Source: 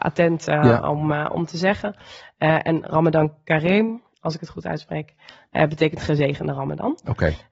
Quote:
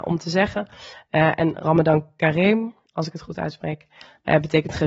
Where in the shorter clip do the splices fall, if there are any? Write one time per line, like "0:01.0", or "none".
none